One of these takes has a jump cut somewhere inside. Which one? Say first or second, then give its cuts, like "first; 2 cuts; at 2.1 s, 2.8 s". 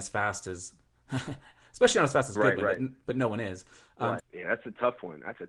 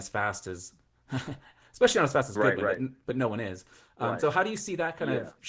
first; 1 cut; at 4.2 s